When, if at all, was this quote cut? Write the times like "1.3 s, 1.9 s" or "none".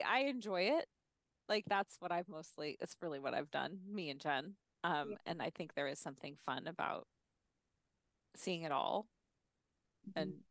none